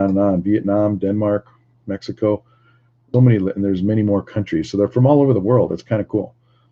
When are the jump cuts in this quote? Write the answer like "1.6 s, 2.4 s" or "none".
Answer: 3.1 s